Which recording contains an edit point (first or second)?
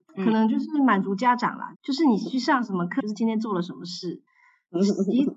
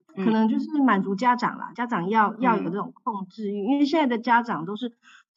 first